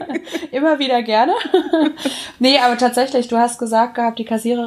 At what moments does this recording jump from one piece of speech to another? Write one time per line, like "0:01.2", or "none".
none